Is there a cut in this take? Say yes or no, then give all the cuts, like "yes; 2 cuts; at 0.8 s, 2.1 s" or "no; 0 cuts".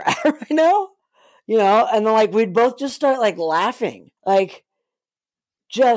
yes; 1 cut; at 4.2 s